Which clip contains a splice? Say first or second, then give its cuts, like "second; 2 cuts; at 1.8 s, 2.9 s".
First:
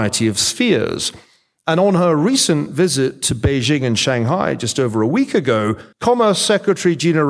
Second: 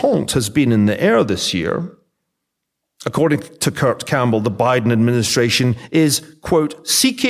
first; 1 cut; at 5.9 s